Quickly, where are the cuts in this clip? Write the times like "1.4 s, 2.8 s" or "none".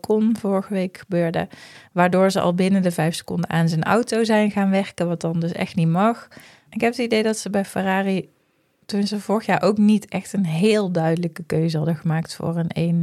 6.6 s